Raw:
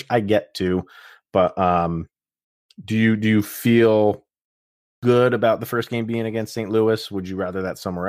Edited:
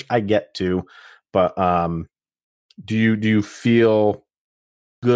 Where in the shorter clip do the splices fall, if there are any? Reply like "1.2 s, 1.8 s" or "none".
none